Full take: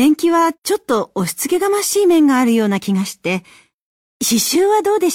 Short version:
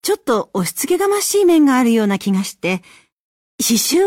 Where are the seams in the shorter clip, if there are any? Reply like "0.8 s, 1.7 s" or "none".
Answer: none